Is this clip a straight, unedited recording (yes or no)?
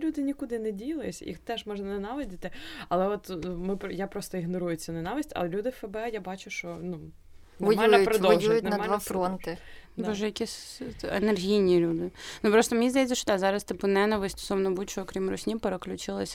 yes